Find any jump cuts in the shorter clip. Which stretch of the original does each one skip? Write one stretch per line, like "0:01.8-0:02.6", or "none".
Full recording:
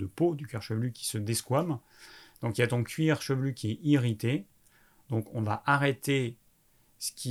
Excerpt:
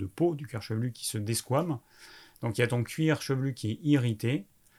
none